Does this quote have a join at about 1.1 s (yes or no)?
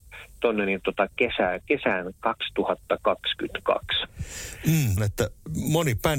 no